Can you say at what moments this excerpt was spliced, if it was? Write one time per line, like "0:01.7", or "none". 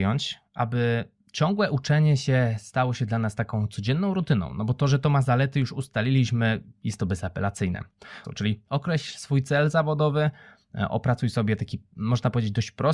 0:08.2